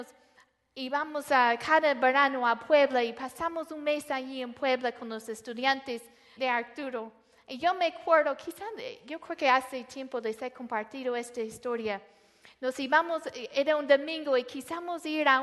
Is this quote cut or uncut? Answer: cut